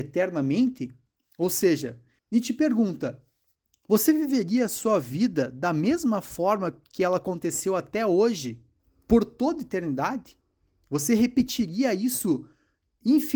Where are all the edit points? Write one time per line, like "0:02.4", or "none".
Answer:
none